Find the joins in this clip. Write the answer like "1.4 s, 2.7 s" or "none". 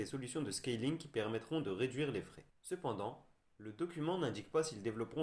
2.5 s